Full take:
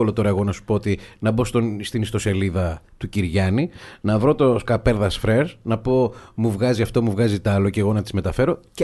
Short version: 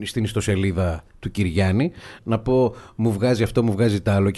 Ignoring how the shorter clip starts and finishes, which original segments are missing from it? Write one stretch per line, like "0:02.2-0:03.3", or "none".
0:04.0-0:05.6